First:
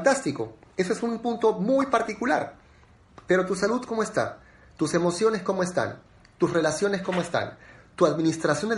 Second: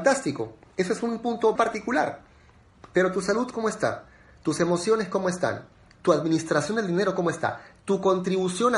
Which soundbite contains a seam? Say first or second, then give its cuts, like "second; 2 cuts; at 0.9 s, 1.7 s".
second; 2 cuts; at 1.5 s, 5.9 s